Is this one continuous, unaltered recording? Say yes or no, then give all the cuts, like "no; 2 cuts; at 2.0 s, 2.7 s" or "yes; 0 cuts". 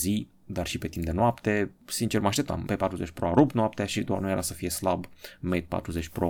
no; 1 cut; at 2.6 s